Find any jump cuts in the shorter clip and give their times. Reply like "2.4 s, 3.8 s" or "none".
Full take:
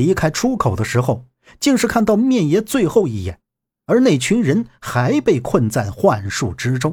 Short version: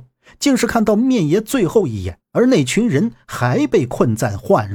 2.2 s